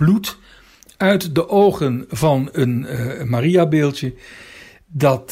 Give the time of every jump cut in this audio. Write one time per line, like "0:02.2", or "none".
none